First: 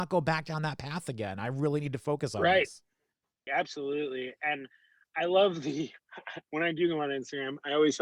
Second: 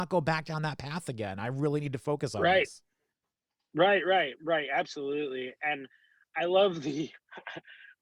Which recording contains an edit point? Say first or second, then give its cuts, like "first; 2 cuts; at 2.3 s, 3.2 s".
first; 2 cuts; at 3.5 s, 6.4 s